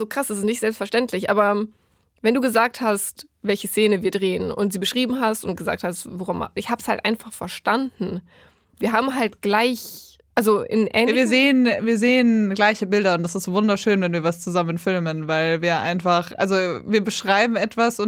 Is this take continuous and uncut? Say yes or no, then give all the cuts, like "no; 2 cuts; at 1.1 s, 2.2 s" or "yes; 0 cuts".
no; 1 cut; at 6.6 s